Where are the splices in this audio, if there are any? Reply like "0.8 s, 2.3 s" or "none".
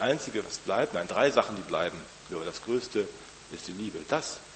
2.3 s